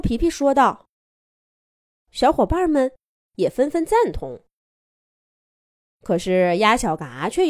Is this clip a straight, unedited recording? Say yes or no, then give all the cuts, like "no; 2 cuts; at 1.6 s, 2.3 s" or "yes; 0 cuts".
yes; 0 cuts